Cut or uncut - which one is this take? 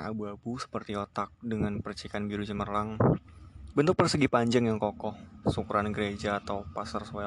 cut